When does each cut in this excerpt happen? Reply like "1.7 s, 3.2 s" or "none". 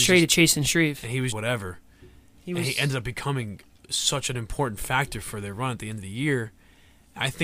1.3 s